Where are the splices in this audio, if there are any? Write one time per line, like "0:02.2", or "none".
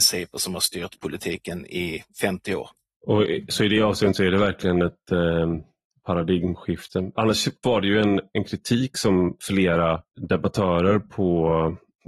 0:07.6